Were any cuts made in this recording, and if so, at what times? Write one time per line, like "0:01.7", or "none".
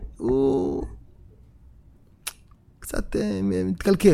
none